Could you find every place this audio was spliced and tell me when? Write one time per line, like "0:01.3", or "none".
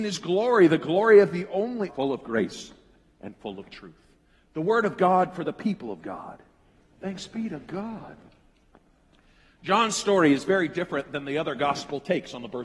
0:01.9